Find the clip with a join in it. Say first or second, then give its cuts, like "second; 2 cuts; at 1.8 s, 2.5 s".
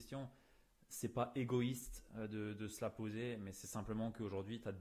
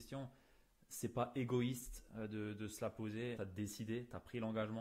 second; 1 cut; at 3.4 s